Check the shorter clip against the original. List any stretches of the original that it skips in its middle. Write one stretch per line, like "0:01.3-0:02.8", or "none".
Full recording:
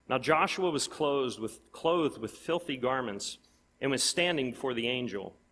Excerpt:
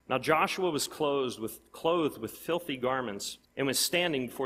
0:03.4-0:03.7